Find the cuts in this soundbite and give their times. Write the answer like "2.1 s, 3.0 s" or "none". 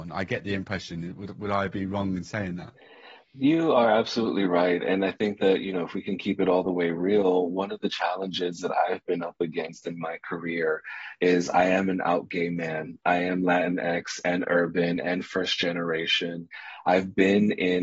none